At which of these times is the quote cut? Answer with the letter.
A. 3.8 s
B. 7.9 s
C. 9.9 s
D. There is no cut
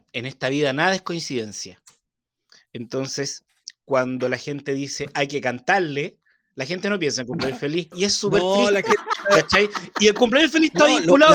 B